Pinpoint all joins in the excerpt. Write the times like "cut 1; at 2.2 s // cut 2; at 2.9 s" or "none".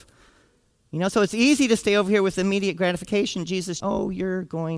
cut 1; at 3.8 s